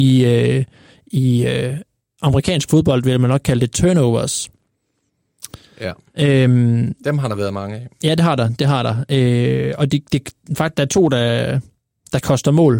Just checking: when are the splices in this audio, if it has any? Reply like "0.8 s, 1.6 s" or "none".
none